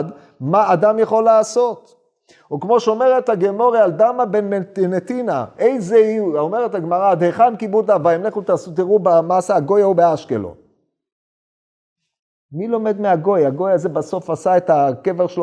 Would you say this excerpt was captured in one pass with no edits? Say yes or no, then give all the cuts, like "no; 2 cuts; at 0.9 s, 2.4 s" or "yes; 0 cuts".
yes; 0 cuts